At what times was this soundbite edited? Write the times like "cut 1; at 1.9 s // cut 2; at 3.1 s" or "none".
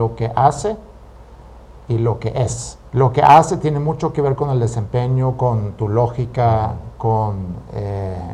cut 1; at 2.9 s